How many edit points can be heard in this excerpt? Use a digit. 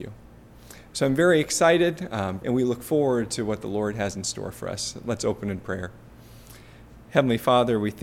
1